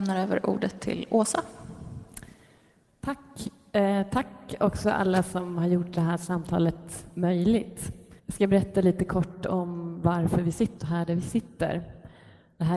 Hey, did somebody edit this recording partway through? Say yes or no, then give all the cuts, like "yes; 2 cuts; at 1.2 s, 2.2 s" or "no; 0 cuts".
yes; 2 cuts; at 8.2 s, 10.8 s